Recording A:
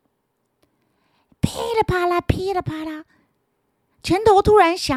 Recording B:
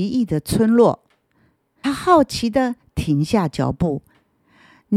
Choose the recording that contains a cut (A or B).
B